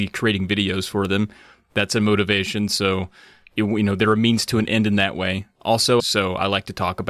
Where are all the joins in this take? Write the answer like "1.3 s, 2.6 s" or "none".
6.0 s